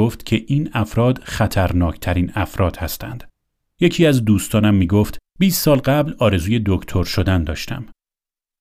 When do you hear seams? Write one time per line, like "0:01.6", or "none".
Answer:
0:03.6
0:05.3

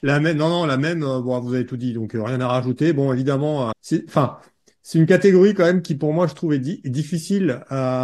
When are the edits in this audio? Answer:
0:03.7

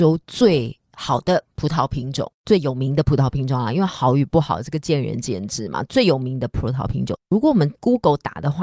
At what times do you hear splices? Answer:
none

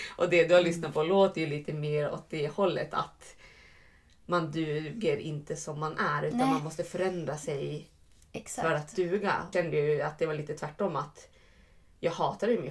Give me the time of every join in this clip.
0:09.5

